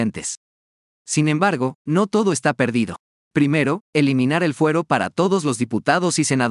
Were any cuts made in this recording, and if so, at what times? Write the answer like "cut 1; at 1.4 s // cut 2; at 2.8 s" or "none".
cut 1; at 3.2 s